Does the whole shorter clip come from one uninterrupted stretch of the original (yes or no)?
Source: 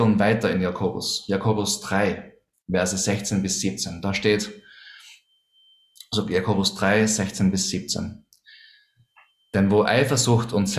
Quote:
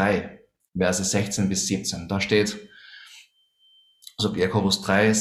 yes